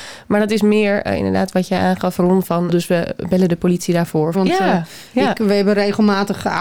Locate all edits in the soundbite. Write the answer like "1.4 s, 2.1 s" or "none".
2.7 s, 4.3 s